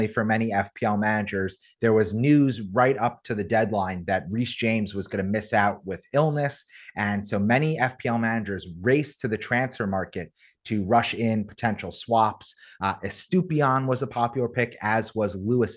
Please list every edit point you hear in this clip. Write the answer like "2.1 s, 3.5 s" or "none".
none